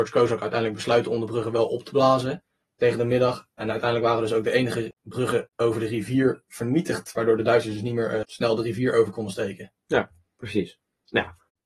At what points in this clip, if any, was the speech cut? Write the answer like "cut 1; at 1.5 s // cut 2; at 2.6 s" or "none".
cut 1; at 8.2 s